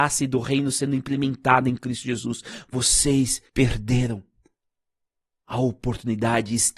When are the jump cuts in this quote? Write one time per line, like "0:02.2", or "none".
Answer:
0:03.5